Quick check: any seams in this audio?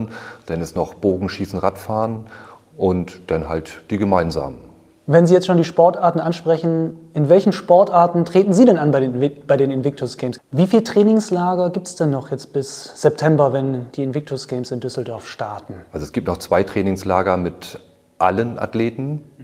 yes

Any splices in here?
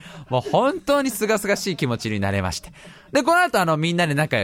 no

